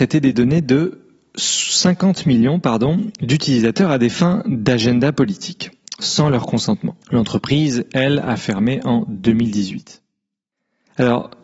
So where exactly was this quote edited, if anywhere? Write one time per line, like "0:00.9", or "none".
none